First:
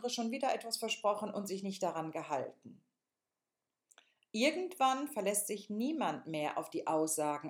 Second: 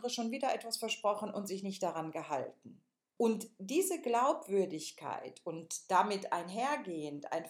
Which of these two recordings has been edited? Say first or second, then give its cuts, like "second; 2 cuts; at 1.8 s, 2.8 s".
second; 1 cut; at 3.2 s